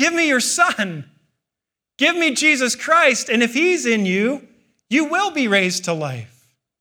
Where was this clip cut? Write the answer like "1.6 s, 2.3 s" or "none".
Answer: none